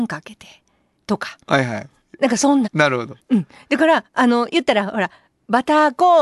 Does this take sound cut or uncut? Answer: cut